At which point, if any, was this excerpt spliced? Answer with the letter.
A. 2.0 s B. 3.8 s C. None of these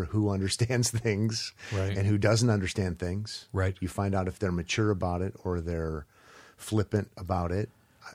C